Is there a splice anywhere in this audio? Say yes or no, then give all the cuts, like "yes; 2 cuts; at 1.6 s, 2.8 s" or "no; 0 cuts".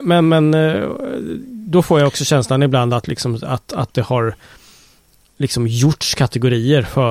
no; 0 cuts